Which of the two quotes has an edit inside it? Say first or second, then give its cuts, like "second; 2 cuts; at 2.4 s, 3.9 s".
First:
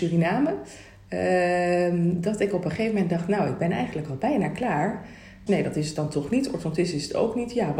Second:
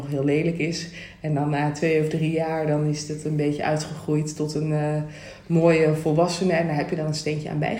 first; 1 cut; at 5.5 s